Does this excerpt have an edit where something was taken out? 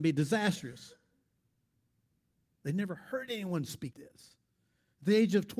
yes; 2 cuts; at 2.6 s, 3.9 s

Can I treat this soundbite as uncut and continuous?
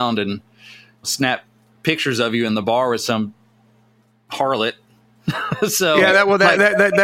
yes; 0 cuts

